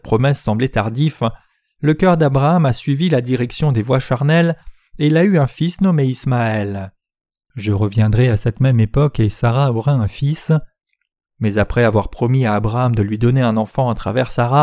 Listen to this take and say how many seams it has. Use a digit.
2